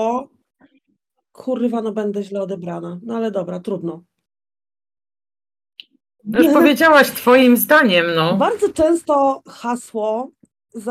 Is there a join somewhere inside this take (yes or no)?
no